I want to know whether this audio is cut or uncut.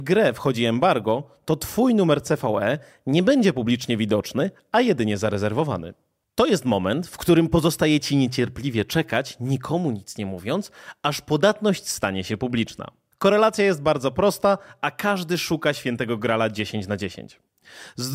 cut